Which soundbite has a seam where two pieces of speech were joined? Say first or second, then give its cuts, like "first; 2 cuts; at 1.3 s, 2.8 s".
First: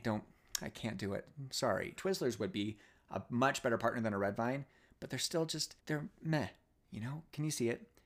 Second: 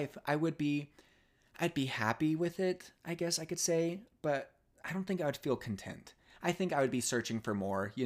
first; 2 cuts; at 2.0 s, 5.8 s